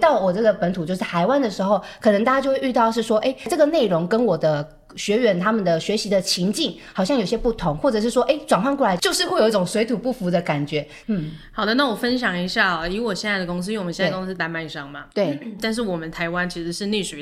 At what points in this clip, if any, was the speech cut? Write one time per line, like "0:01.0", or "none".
0:11.0